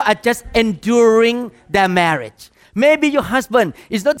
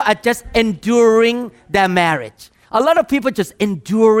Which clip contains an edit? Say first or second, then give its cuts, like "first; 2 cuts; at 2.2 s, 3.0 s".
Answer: first; 1 cut; at 2.6 s